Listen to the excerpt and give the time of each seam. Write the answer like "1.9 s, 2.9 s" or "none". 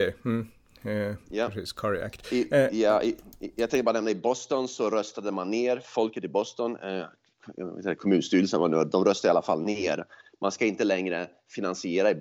none